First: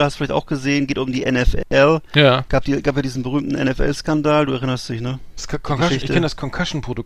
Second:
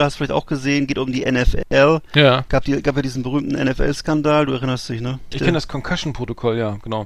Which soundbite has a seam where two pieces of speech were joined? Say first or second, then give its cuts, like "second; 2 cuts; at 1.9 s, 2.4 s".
second; 1 cut; at 5.3 s